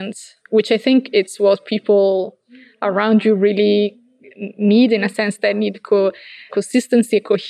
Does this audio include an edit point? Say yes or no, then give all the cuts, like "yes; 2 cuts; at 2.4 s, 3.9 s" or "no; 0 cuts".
yes; 1 cut; at 6.5 s